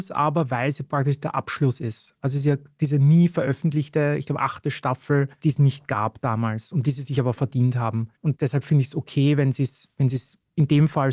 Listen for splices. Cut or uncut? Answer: uncut